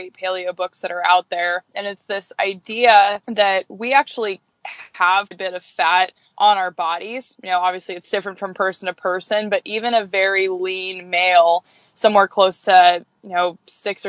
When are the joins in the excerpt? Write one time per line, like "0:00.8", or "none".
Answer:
0:03.2
0:05.3